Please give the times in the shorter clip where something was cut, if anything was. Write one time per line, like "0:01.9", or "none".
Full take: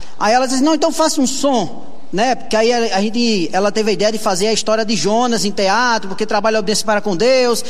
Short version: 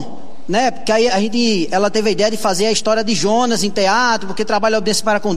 0:01.1